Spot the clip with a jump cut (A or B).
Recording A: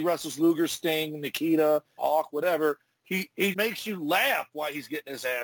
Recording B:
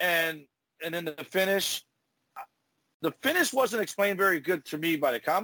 A